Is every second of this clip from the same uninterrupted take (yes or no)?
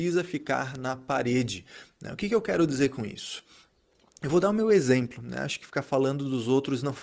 yes